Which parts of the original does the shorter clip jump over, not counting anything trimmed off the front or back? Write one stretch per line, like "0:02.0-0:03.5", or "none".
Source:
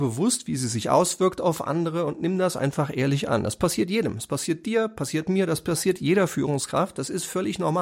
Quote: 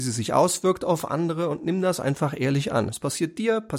0:03.4-0:04.1